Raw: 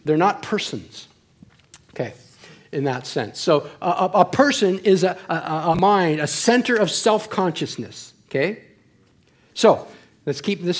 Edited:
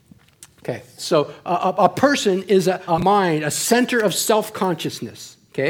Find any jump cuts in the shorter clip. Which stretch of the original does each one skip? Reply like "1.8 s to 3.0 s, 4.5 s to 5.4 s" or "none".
2.3 s to 3.3 s, 5.2 s to 5.6 s